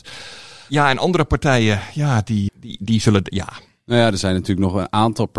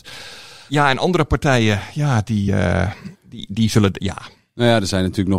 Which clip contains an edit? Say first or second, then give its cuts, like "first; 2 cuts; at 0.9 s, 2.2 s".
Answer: first; 1 cut; at 2.5 s